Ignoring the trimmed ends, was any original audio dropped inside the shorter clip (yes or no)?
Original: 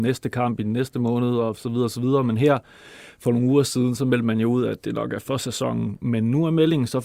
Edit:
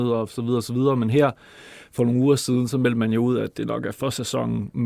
no